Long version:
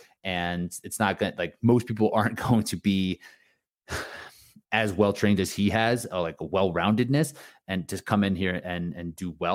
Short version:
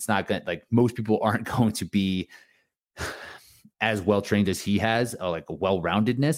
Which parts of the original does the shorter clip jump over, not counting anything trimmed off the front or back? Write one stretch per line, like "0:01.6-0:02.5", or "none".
none